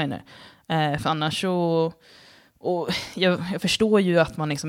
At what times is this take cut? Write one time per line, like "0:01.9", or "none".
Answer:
none